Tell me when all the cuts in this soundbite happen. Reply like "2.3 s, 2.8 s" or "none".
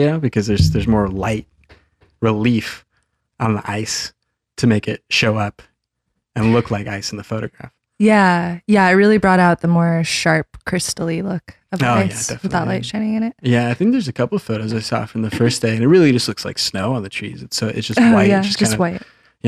none

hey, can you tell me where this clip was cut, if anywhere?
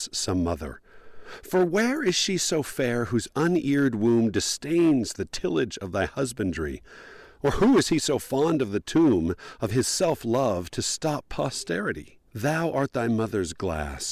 12.3 s

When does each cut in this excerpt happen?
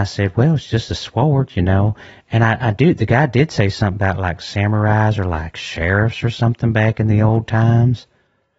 none

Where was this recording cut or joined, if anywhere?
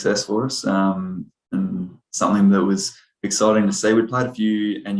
none

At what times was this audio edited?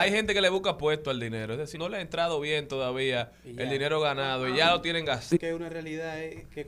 1.7 s, 5.3 s

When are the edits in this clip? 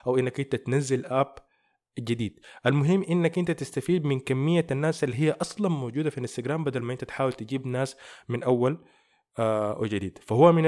none

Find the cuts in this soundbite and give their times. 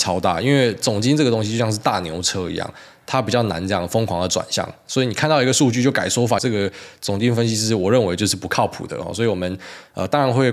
6.4 s

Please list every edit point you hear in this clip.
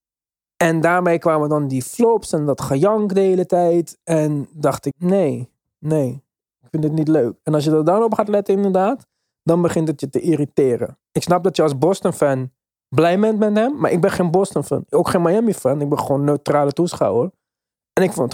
4.9 s

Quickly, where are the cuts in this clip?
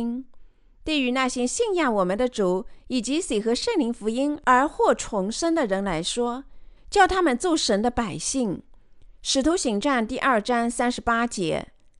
6.8 s

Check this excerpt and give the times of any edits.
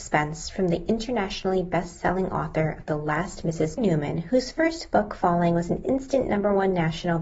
3.8 s

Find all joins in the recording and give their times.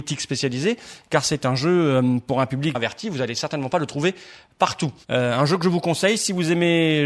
2.7 s

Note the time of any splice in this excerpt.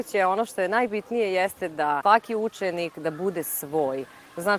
2.0 s

